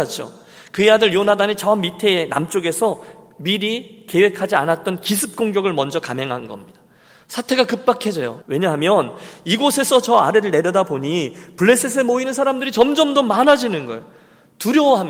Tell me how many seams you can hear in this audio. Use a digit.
1